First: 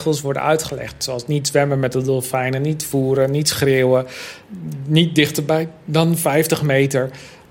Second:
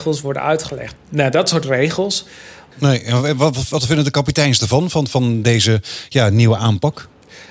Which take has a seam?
second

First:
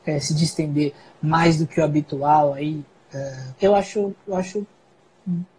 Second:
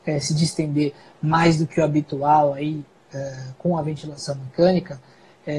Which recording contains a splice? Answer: first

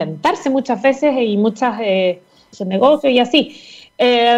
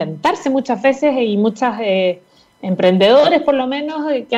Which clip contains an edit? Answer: first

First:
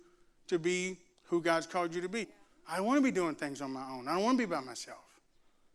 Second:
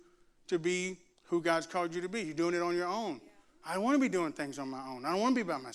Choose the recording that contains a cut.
first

